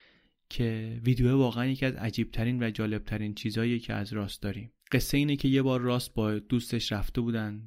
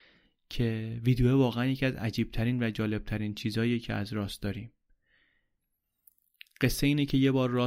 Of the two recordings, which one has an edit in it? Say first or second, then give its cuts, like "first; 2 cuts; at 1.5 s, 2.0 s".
first; 1 cut; at 4.8 s